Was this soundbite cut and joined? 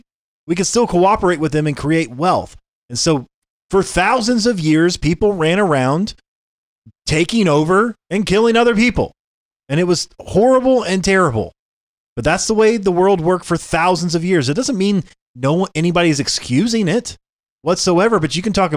no; 0 cuts

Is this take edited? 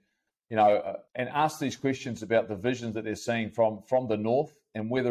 yes; 1 cut; at 1.1 s

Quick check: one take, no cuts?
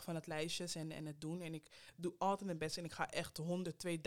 yes; 0 cuts

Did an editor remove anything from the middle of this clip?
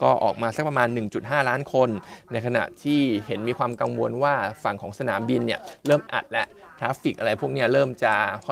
yes; 1 cut; at 6.1 s

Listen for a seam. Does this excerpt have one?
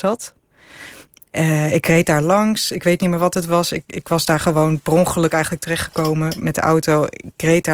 no; 0 cuts

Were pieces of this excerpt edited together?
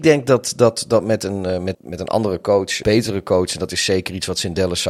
yes; 2 cuts; at 1.7 s, 2.8 s

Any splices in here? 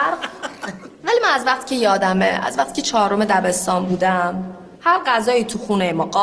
yes; 2 cuts; at 0.9 s, 4.7 s

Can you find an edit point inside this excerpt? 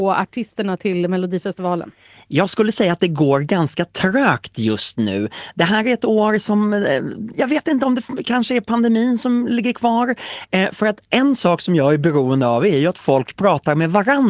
yes; 1 cut; at 7.3 s

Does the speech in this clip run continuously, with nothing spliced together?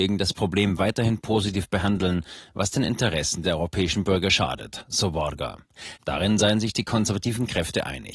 yes; 0 cuts

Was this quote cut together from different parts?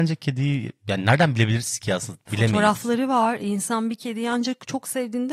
yes; 1 cut; at 2.3 s

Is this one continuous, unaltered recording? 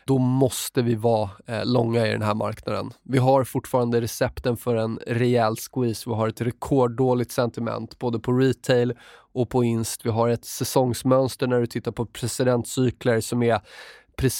yes; 0 cuts

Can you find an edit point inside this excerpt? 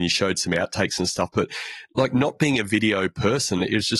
no; 0 cuts

